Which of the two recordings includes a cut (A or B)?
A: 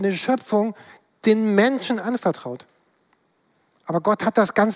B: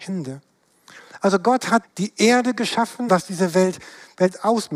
B